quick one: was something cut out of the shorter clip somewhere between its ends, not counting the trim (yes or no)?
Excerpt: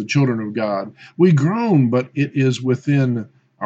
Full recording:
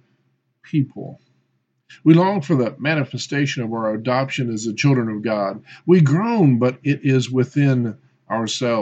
no